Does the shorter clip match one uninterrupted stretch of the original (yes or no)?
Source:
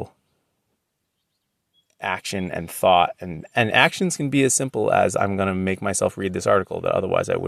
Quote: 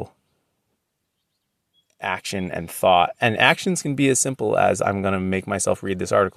no